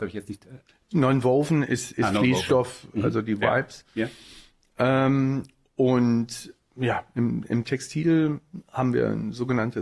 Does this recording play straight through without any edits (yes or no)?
yes